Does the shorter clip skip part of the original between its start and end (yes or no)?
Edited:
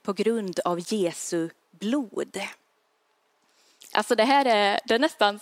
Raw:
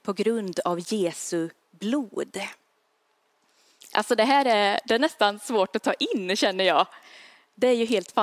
no